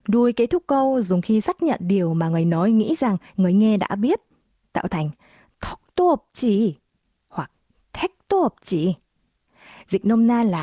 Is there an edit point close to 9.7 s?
no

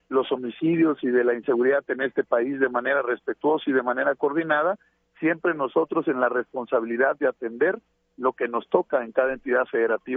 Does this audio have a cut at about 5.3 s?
no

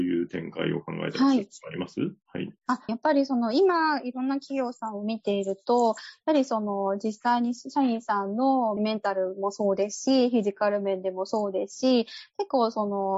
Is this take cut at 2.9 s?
yes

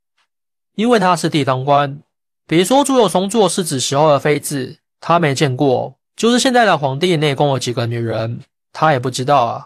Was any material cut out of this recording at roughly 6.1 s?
yes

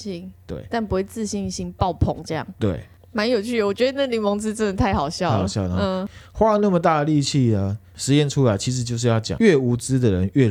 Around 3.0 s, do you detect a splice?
no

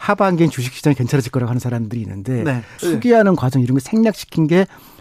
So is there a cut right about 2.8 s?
yes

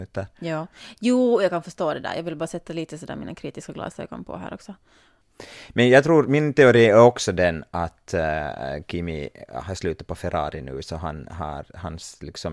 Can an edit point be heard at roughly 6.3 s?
no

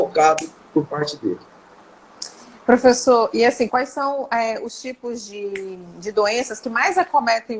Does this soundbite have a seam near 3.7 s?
yes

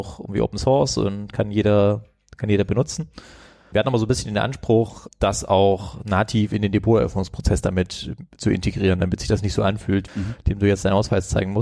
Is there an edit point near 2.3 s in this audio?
no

